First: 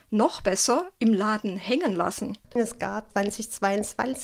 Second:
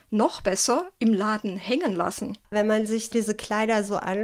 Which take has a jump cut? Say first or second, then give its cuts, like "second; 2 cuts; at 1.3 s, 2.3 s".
first; 1 cut; at 2.4 s